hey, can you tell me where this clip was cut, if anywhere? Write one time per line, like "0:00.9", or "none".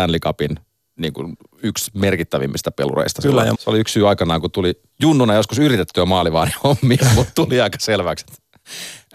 0:03.5
0:04.9